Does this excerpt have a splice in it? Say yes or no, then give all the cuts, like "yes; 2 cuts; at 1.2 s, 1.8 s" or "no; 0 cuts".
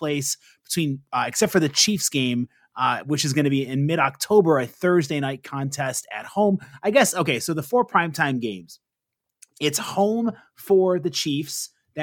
no; 0 cuts